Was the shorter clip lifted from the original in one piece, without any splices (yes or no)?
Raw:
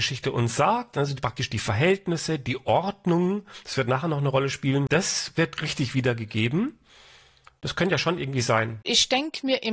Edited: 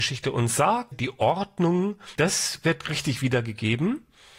no